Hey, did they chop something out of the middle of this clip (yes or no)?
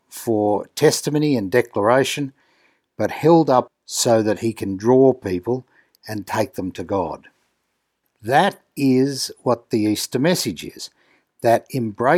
yes